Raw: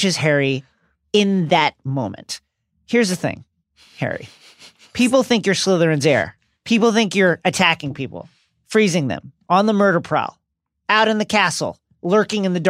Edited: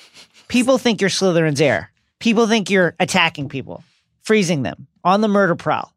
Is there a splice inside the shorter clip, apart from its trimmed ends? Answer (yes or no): no